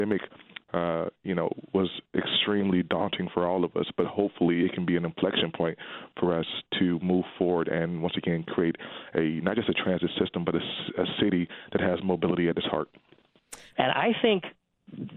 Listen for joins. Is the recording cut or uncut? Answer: cut